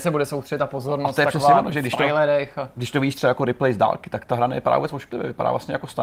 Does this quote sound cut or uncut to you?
uncut